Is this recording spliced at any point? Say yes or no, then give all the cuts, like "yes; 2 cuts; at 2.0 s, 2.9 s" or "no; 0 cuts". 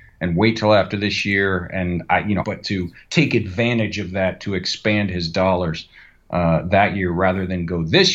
yes; 1 cut; at 2.4 s